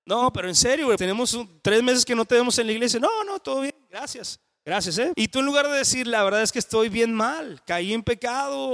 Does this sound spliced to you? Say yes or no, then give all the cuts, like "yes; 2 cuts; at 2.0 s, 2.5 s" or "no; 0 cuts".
yes; 2 cuts; at 1.0 s, 5.1 s